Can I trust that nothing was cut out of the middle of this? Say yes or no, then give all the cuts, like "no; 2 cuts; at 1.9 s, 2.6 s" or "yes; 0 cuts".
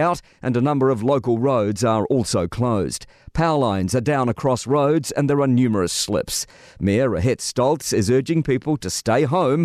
yes; 0 cuts